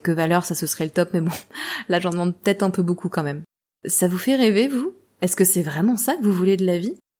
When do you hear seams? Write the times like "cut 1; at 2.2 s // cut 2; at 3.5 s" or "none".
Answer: none